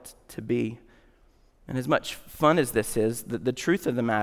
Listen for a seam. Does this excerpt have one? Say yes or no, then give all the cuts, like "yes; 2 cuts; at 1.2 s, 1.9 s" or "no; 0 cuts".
no; 0 cuts